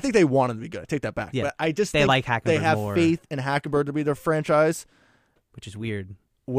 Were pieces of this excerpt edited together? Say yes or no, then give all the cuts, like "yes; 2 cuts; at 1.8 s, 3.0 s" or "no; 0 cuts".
no; 0 cuts